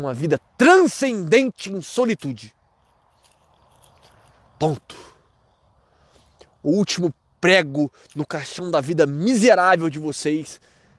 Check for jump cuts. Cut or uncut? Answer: uncut